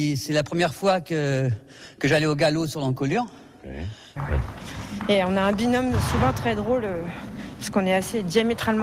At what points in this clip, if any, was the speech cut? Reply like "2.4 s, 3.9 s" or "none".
4.2 s